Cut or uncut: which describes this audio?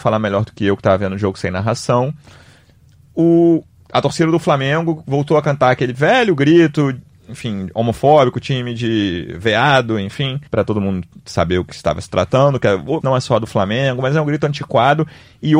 cut